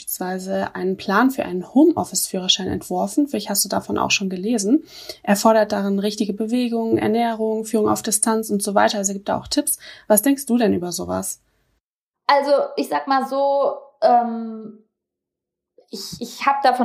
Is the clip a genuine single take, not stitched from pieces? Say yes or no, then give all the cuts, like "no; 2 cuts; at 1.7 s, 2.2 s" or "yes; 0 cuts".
yes; 0 cuts